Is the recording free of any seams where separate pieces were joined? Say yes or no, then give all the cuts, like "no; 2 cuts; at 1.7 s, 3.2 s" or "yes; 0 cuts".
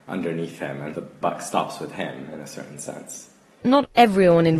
yes; 0 cuts